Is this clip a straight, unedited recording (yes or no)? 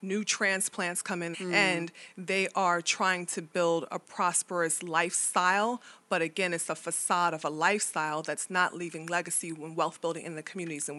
no